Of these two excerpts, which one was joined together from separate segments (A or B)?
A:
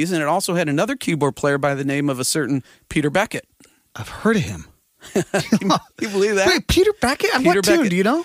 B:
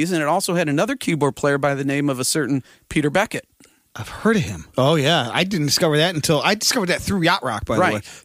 B